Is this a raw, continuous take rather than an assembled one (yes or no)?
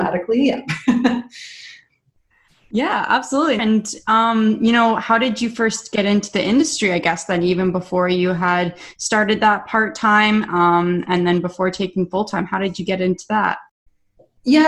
no